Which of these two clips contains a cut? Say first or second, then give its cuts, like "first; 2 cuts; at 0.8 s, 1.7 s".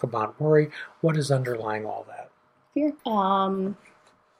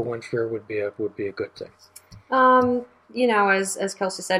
first; 1 cut; at 3.0 s